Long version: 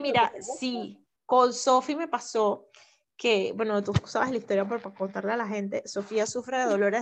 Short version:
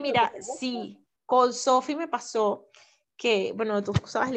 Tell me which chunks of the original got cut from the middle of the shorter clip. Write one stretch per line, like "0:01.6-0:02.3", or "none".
none